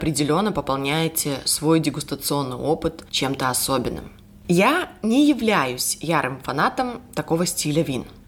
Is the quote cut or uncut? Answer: uncut